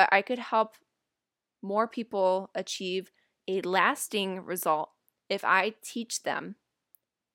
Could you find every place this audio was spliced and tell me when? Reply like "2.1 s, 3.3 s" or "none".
none